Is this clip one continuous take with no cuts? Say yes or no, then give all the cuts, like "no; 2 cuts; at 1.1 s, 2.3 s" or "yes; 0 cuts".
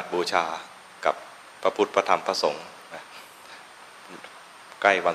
yes; 0 cuts